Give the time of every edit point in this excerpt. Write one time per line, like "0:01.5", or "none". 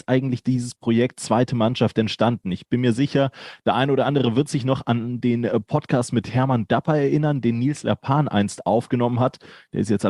none